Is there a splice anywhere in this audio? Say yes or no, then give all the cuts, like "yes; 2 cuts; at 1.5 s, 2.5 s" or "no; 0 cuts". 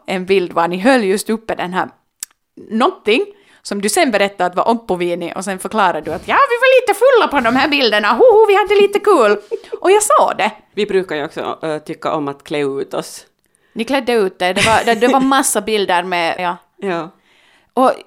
yes; 1 cut; at 16.4 s